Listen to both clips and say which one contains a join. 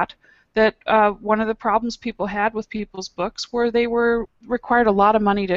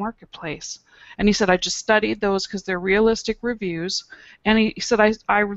second; 1 cut; at 1.1 s

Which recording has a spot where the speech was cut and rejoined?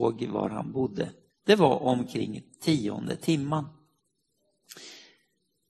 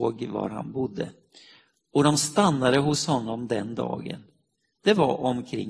first; 1 cut; at 1.3 s

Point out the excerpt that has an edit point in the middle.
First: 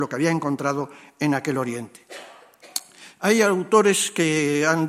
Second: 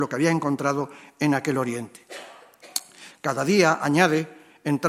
second; 1 cut; at 3.1 s

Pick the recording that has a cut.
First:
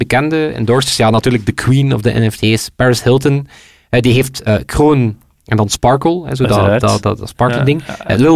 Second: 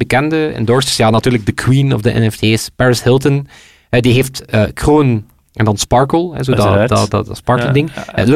first; 1 cut; at 4.5 s

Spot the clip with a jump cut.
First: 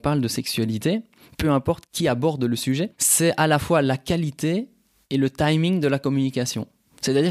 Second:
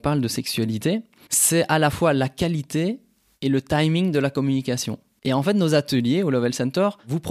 second; 2 cuts; at 1.3 s, 5.2 s

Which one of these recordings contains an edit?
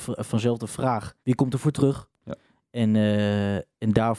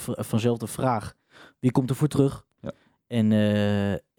first; 1 cut; at 1.2 s

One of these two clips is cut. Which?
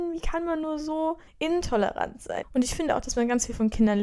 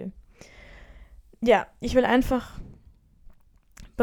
first; 2 cuts; at 1.3 s, 2.4 s

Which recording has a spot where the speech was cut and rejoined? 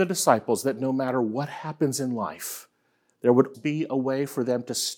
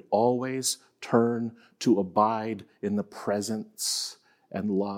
first; 1 cut; at 3.5 s

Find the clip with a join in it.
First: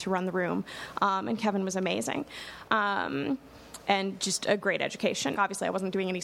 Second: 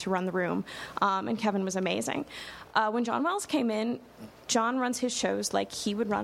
first; 2 cuts; at 2.7 s, 5.3 s

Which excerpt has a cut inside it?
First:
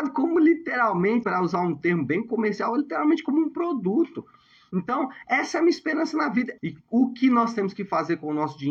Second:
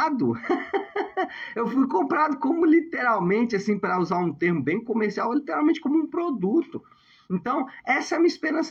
first; 2 cuts; at 1.2 s, 6.6 s

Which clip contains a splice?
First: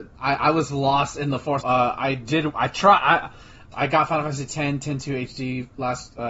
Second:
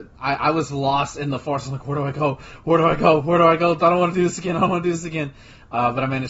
first; 2 cuts; at 1.6 s, 3.7 s

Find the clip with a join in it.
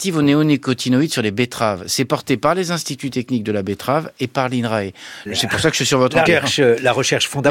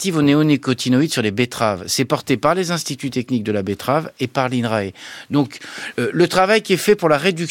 first; 2 cuts; at 5.3 s, 6.3 s

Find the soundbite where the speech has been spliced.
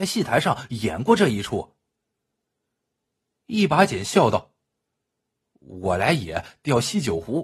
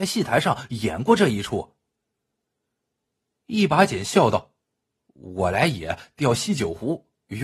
second; 1 cut; at 4.6 s

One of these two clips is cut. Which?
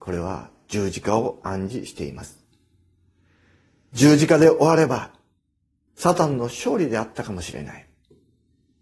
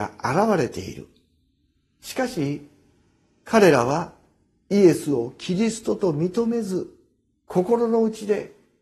first; 1 cut; at 5.9 s

